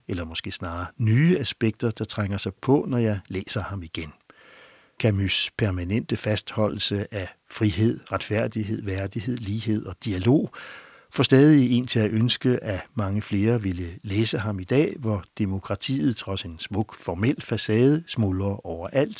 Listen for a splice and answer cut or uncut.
uncut